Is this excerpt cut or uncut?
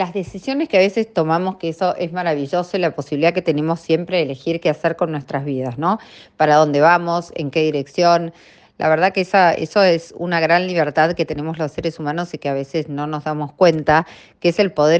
uncut